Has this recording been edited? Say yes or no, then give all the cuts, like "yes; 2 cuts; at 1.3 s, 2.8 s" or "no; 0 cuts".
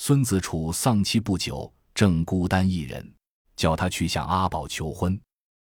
yes; 1 cut; at 3.4 s